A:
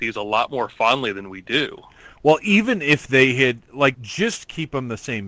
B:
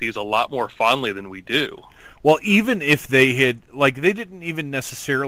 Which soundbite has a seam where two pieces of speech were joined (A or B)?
A